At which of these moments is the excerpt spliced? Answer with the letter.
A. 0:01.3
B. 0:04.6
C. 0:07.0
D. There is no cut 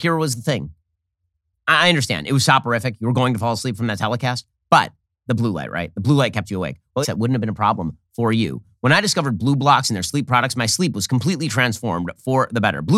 C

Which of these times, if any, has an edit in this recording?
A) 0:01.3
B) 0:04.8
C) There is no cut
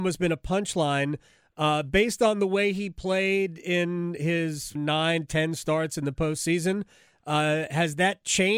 B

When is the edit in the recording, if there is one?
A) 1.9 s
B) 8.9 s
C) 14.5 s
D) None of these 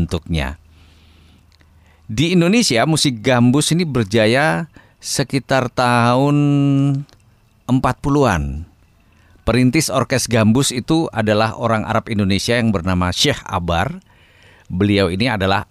D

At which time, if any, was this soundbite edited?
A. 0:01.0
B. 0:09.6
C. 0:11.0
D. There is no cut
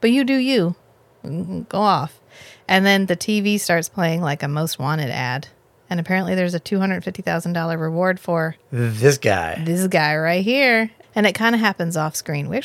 C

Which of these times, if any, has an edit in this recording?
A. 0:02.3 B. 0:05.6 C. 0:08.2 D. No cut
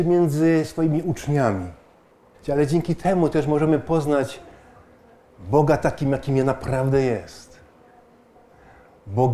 A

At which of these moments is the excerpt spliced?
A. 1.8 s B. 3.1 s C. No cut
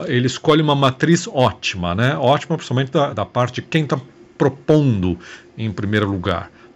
B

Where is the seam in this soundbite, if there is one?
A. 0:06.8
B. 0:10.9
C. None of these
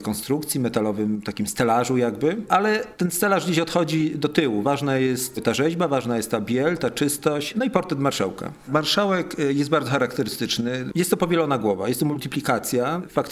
B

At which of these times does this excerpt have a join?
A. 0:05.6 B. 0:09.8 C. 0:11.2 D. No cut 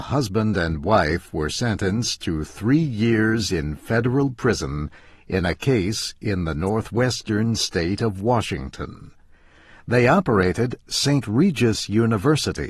D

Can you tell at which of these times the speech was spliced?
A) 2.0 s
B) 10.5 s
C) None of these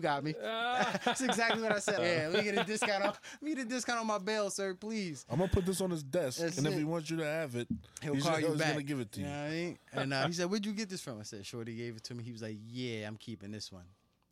A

